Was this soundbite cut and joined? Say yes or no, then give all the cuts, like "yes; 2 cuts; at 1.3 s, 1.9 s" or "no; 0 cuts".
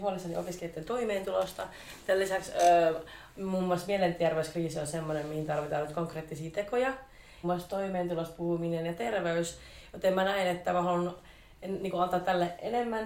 yes; 1 cut; at 7.4 s